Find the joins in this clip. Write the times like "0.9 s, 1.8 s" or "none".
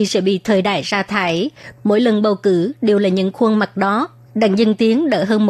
1.8 s, 4.3 s